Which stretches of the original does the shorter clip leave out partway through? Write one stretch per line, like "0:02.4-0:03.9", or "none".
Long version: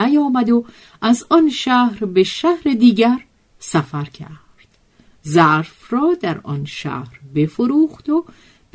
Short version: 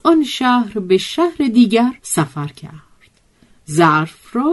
0:03.2-0:03.6